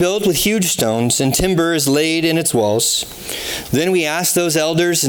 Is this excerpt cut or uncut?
cut